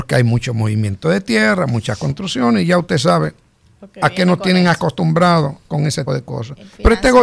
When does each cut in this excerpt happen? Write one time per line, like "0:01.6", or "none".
0:06.1